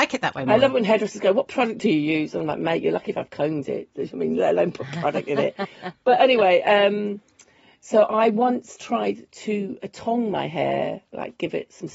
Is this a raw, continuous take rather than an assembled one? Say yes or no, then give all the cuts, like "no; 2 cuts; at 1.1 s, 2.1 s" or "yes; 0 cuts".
yes; 0 cuts